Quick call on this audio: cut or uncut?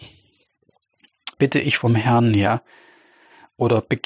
cut